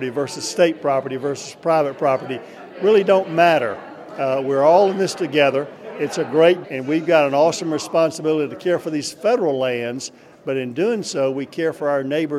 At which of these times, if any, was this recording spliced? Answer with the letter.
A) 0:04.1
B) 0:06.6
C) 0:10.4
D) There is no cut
B